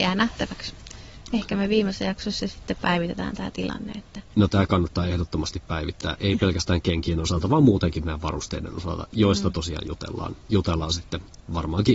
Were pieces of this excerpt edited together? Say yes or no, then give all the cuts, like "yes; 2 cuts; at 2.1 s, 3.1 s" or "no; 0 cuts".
no; 0 cuts